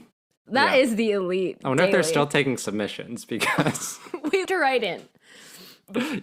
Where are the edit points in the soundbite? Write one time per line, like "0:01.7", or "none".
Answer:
0:04.5